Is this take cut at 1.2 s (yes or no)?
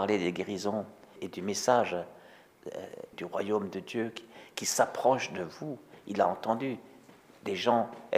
yes